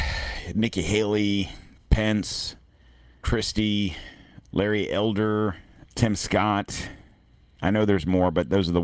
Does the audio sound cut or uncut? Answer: cut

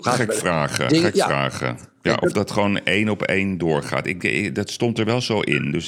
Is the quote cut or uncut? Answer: uncut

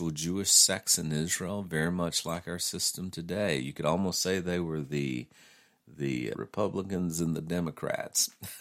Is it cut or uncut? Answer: cut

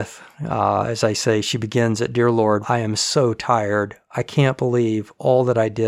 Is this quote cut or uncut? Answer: cut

